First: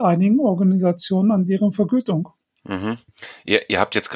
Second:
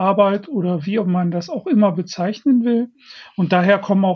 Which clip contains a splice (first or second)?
first